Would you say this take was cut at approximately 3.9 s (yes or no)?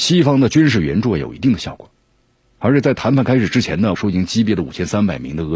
yes